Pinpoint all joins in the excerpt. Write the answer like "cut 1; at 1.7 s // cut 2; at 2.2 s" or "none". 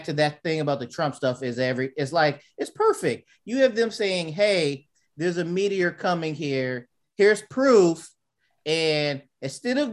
cut 1; at 7.0 s

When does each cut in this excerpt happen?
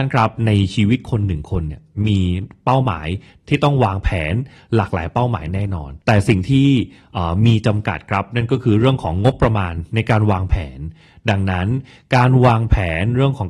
cut 1; at 6.0 s

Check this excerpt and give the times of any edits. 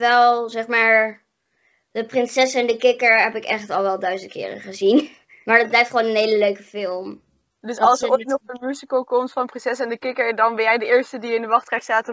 none

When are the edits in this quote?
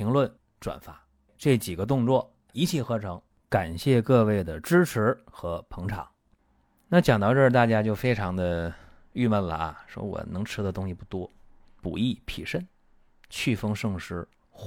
cut 1; at 11.8 s

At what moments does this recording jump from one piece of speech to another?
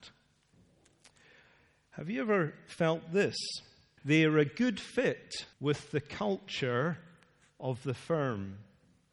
cut 1; at 4.0 s // cut 2; at 5.5 s

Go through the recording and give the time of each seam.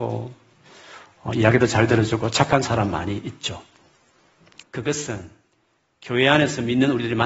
cut 1; at 4.6 s

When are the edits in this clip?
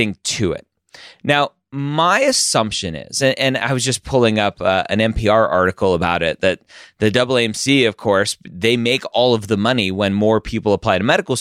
none

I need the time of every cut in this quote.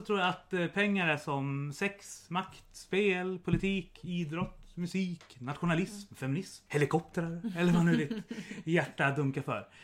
cut 1; at 6.7 s

